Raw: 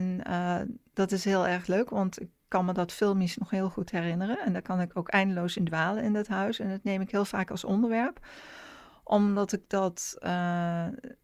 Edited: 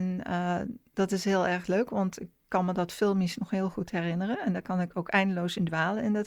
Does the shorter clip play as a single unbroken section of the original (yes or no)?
yes